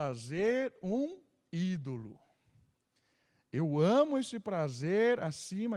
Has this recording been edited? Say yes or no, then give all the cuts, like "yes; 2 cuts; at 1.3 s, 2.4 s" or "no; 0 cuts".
no; 0 cuts